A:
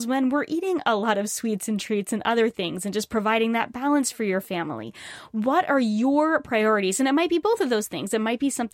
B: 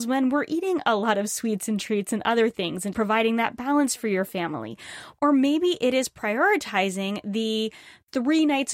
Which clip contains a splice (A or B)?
B